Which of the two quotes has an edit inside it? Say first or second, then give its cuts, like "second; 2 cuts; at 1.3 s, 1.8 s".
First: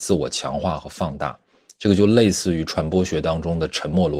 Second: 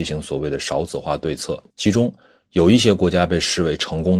second; 1 cut; at 1.7 s